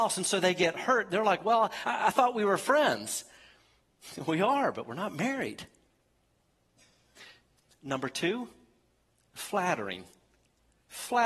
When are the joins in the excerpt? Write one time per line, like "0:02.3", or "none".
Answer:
none

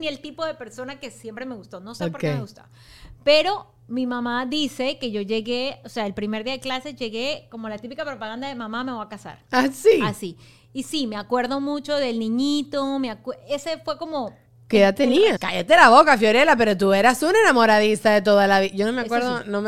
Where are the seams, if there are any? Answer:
0:15.4

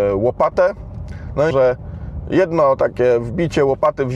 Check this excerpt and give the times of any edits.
0:01.5

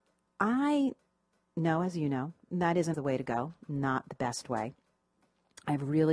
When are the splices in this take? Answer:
0:02.9

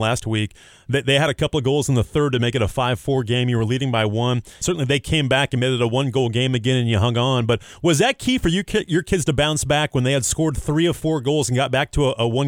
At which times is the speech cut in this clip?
0:04.6

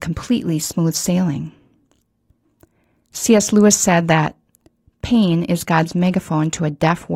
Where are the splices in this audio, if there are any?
none

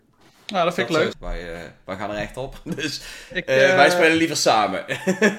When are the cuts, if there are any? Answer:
0:01.1

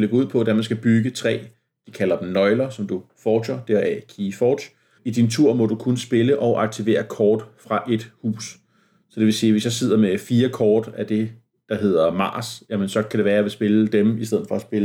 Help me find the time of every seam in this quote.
0:05.0

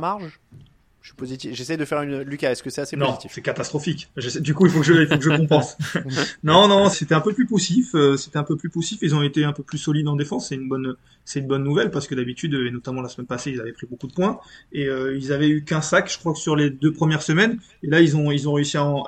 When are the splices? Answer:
0:06.9

